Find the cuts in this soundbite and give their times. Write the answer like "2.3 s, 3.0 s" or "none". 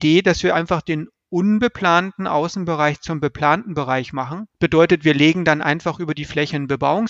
4.5 s